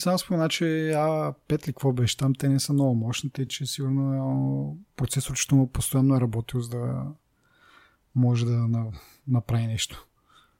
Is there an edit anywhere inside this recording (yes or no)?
no